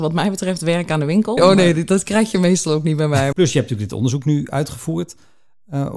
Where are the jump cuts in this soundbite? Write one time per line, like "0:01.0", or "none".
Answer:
0:01.4
0:03.3